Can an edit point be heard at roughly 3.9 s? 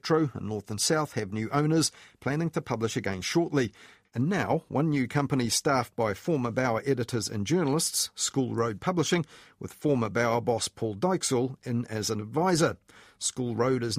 no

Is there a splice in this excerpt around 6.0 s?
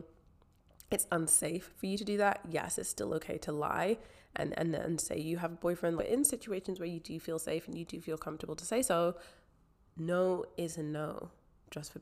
yes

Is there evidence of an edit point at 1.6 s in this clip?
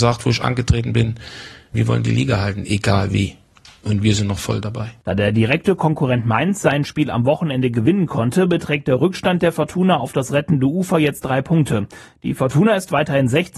no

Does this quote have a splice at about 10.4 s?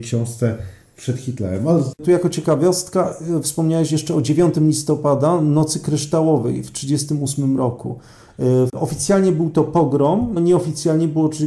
yes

